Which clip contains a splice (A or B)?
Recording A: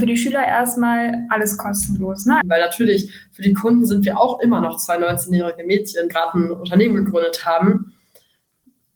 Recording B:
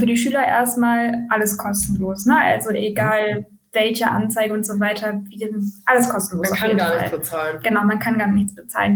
A